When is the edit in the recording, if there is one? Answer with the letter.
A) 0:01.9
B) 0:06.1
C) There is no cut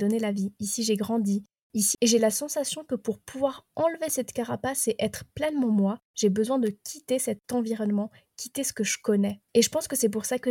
A